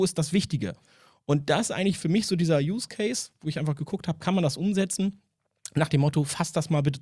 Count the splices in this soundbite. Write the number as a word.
zero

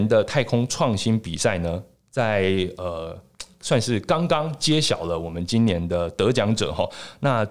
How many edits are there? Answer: zero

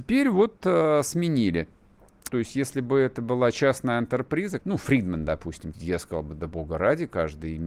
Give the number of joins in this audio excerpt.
three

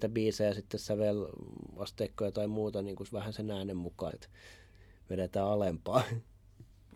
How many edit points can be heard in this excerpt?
one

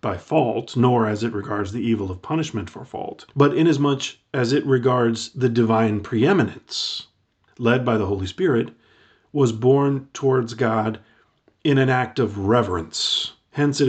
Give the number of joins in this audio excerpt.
two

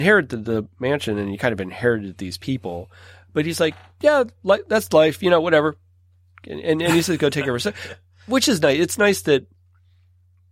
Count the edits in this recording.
zero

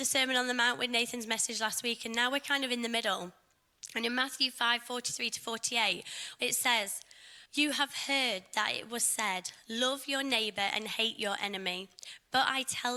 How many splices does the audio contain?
two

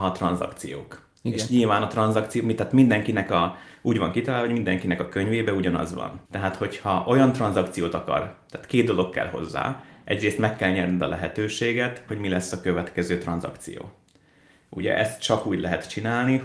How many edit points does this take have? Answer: two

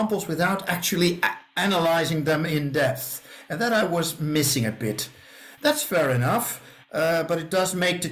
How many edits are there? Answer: one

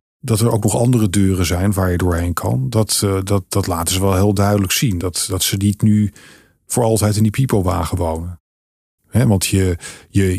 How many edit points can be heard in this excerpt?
two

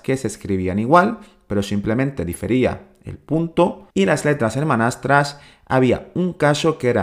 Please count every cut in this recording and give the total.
one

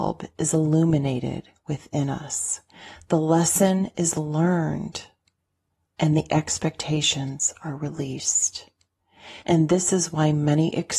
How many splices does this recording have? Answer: one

